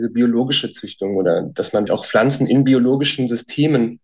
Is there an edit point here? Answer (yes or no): yes